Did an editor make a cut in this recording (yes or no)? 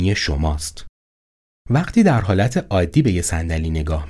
yes